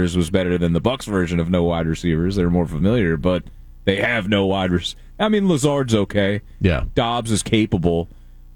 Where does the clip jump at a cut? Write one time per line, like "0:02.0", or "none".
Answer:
none